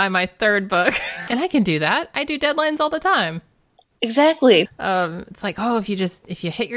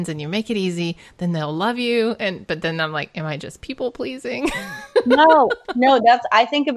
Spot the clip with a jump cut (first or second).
first